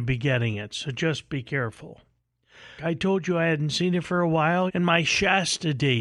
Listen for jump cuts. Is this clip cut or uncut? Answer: cut